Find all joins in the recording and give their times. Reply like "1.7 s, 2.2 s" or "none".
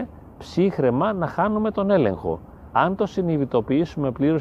2.7 s